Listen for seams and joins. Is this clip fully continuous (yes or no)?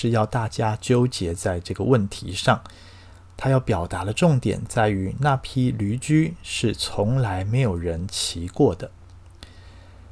yes